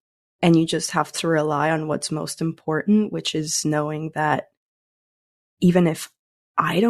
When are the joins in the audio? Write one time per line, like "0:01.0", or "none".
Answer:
none